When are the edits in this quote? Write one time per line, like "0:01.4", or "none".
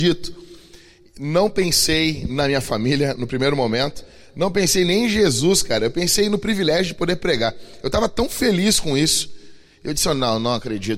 none